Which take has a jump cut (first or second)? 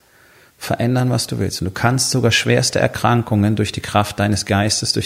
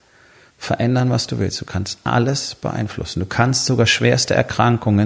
first